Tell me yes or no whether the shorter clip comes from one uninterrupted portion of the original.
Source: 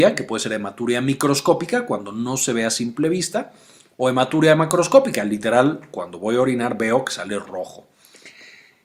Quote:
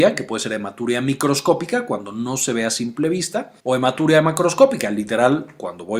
no